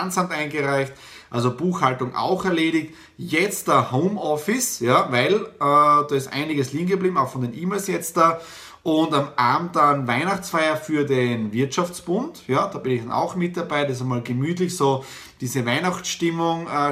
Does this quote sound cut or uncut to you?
uncut